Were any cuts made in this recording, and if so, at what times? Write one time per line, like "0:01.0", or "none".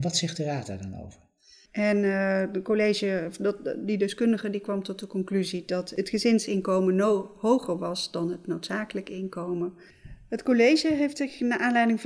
0:01.7